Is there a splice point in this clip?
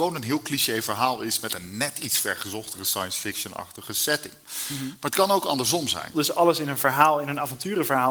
yes; 1 cut; at 6.1 s

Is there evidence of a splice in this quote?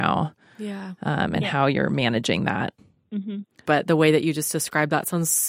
yes; 1 cut; at 3.6 s

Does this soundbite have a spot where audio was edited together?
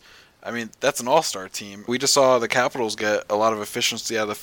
yes; 1 cut; at 1.9 s

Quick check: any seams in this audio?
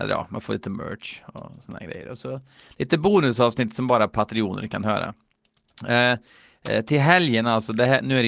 no; 0 cuts

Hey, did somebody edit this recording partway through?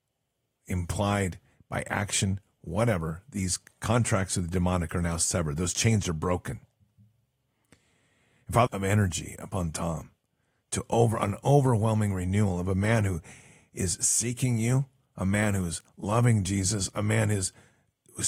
yes; 1 cut; at 8.7 s

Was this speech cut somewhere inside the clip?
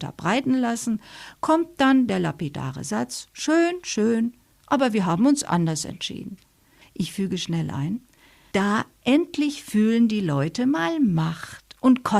yes; 1 cut; at 6.8 s

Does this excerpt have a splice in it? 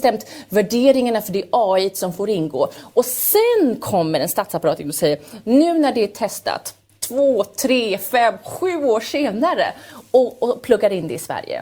no; 0 cuts

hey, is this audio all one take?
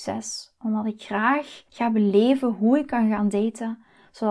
no; 1 cut; at 1.7 s

